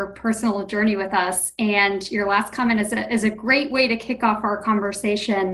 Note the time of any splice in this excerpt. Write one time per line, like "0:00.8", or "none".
none